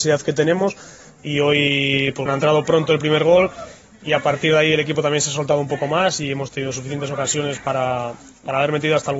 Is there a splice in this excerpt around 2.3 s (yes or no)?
yes